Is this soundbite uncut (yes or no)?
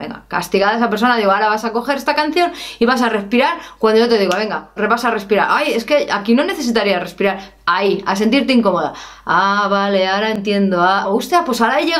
no